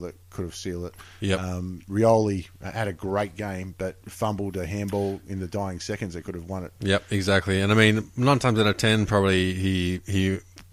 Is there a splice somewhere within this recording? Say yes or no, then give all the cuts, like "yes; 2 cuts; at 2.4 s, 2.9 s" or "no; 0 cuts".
yes; 1 cut; at 4.0 s